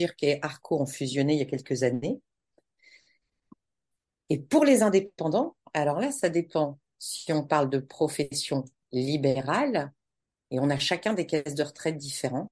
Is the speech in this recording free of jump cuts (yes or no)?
yes